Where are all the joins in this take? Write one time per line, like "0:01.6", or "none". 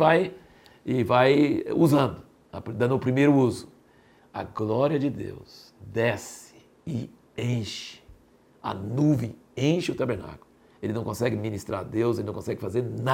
0:04.2
0:10.7